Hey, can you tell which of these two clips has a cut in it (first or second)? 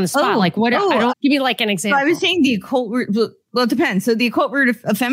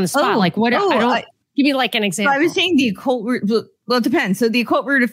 first